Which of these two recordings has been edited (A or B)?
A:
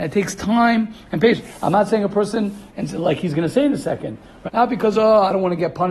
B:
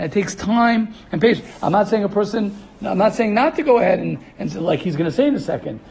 A